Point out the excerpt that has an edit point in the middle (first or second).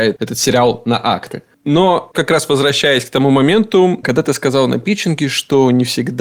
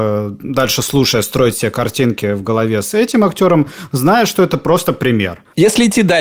first